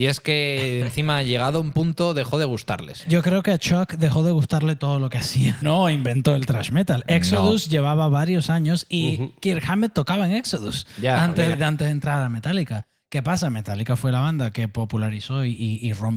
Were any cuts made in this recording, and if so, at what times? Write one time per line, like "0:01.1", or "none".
0:05.6
0:11.5